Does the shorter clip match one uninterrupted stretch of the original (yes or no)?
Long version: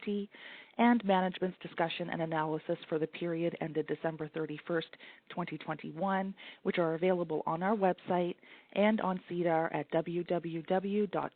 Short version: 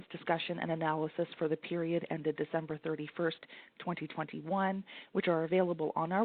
yes